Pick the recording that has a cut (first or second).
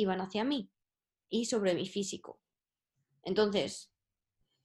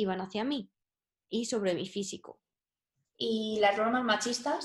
second